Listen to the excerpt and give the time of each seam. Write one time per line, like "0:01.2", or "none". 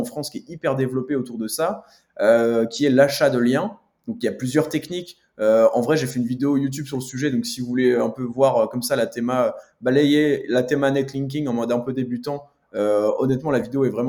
none